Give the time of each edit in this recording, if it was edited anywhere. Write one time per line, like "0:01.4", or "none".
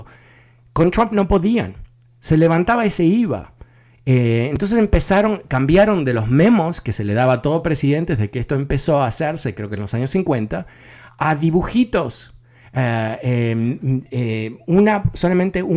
none

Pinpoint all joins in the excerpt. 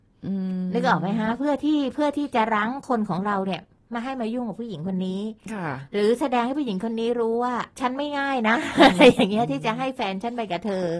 0:07.7

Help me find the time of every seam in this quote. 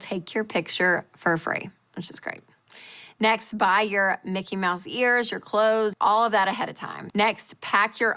0:05.9
0:07.1

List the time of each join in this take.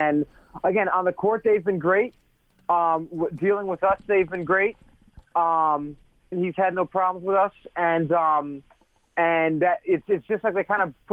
0:06.3

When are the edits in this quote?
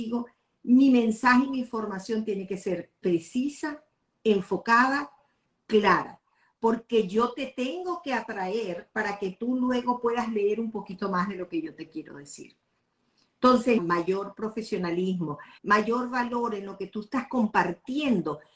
0:13.8
0:15.6

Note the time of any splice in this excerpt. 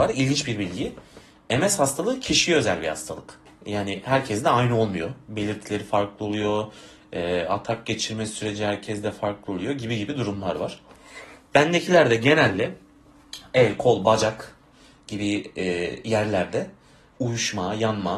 none

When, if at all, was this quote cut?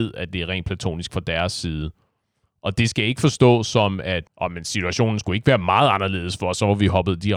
0:04.3

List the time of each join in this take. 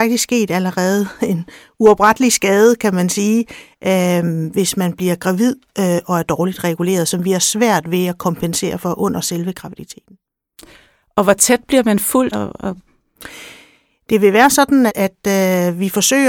0:12.3
0:14.9

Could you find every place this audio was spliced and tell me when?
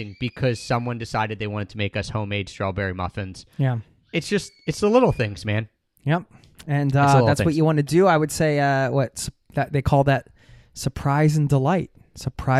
none

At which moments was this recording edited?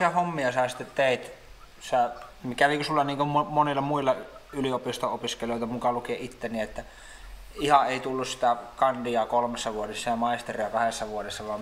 none

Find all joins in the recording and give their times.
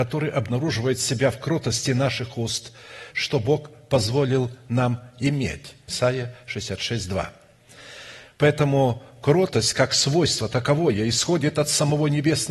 0:03.1
0:05.9
0:08.2

